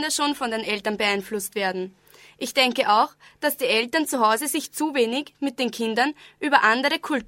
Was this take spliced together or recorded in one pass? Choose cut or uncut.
uncut